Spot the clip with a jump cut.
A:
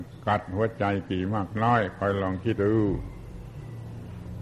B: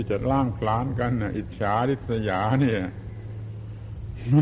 A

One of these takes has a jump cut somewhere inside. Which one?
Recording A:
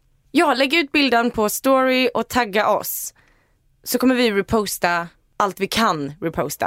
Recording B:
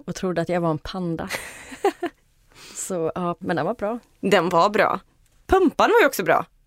B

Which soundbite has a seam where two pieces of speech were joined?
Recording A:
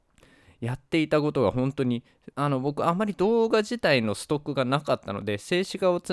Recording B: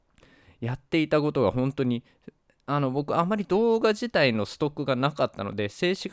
A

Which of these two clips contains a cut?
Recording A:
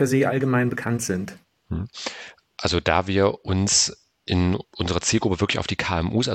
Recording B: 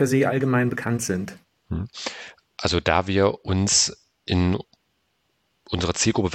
A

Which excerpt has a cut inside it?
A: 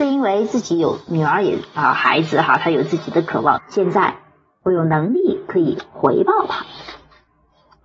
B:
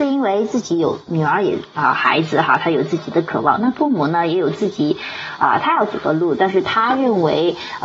A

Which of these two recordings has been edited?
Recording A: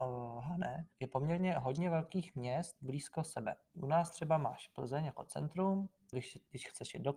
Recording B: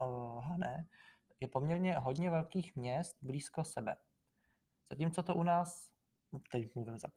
A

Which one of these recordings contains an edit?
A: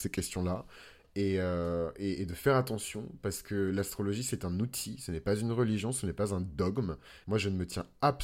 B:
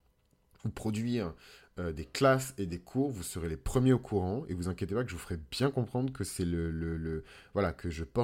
A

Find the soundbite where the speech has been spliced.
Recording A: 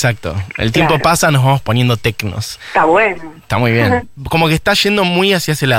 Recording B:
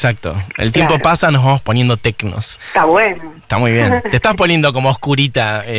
A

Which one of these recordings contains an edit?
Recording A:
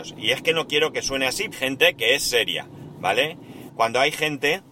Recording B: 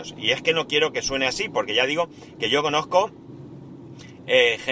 A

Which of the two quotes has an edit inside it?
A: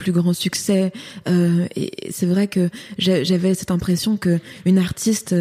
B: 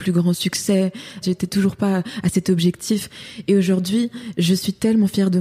B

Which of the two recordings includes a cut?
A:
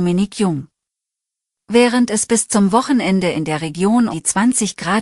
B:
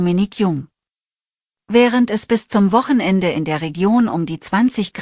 A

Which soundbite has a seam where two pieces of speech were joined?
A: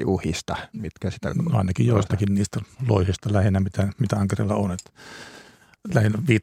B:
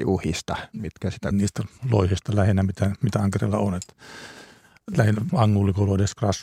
B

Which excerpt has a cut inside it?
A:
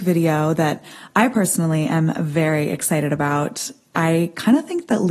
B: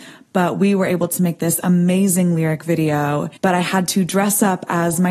B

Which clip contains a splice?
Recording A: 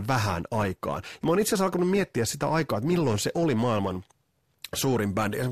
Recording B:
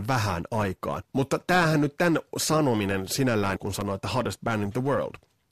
B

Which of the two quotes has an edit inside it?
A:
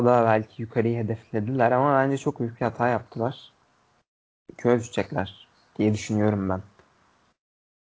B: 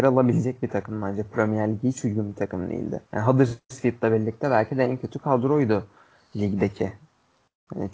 B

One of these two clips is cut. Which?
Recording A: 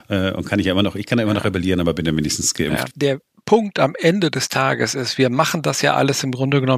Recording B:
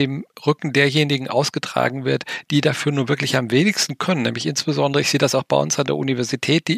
A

